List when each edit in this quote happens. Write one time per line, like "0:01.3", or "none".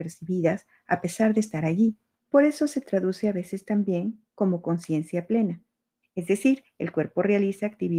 0:02.2
0:06.0